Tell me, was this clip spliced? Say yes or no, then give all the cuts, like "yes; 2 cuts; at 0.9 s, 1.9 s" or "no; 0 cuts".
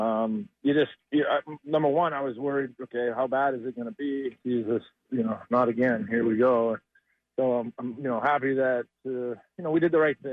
yes; 1 cut; at 4.4 s